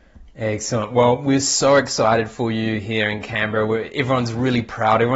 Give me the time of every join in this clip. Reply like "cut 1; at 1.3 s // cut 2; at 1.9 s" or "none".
none